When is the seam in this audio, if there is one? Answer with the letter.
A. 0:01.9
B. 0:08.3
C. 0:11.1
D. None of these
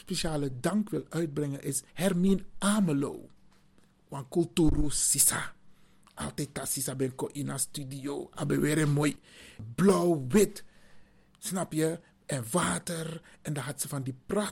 A